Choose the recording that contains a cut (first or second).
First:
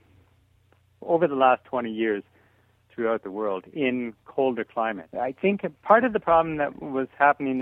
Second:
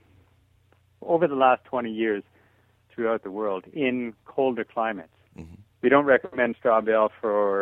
first